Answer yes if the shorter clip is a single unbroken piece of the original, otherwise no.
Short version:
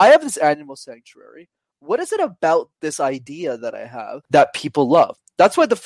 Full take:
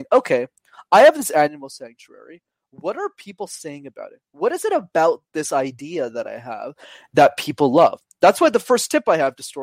no